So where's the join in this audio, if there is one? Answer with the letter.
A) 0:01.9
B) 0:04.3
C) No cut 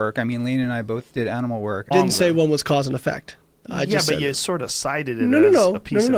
A